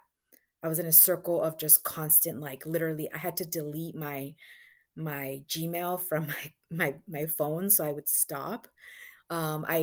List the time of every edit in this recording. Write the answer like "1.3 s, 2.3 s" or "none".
none